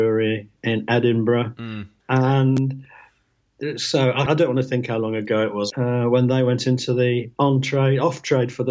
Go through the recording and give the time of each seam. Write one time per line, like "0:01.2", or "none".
0:02.0
0:04.3
0:05.7